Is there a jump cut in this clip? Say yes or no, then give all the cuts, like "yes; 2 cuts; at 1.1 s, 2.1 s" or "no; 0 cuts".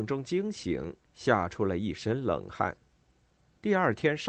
no; 0 cuts